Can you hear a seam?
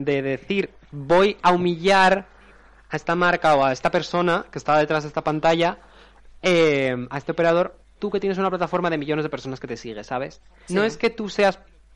yes; 2 cuts; at 8.0 s, 10.7 s

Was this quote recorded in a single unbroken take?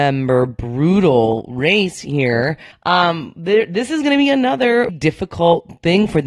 no; 2 cuts; at 2.7 s, 4.9 s

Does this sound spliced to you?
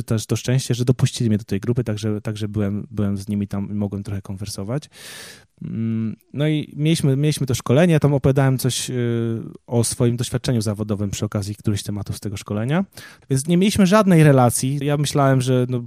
yes; 2 cuts; at 13.2 s, 14.8 s

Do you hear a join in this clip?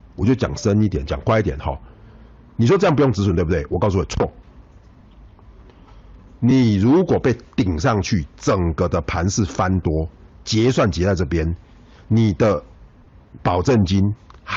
no; 0 cuts

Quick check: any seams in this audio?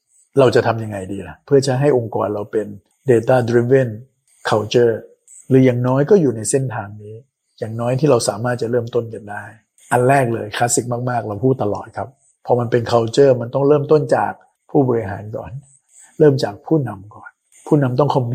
no; 0 cuts

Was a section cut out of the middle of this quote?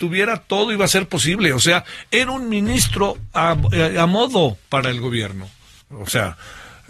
yes; 1 cut; at 5.8 s

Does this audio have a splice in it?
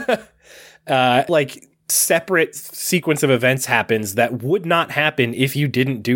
yes; 1 cut; at 1.3 s

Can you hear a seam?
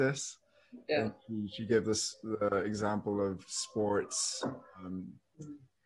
no; 0 cuts

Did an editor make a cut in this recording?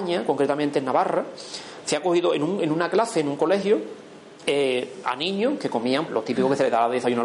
yes; 2 cuts; at 4.4 s, 6.1 s

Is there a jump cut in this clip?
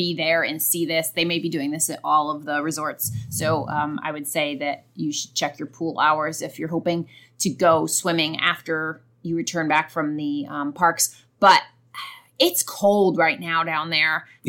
no; 0 cuts

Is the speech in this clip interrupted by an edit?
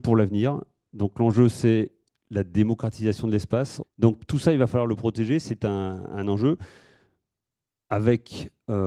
yes; 1 cut; at 3.8 s

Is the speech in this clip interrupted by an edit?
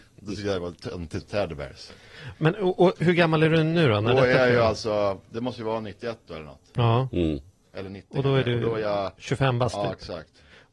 yes; 1 cut; at 1.2 s

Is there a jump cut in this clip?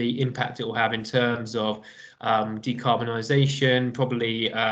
no; 0 cuts

